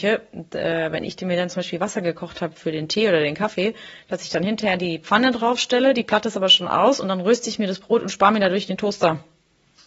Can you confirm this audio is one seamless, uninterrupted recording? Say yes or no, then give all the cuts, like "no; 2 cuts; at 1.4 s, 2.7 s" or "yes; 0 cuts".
yes; 0 cuts